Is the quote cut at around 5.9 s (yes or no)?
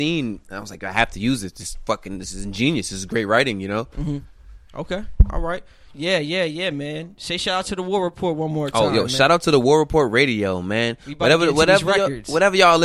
yes